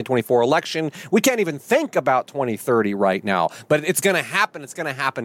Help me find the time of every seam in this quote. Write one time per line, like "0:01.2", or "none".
none